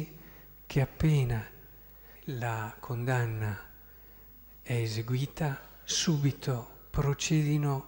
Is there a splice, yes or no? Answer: yes